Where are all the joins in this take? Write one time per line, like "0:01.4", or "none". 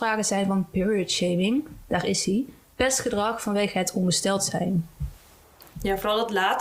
none